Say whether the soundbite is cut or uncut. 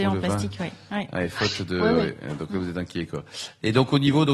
uncut